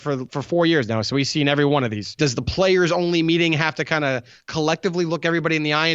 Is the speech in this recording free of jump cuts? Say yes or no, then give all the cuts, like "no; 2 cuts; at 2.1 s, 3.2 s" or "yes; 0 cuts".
no; 1 cut; at 2.2 s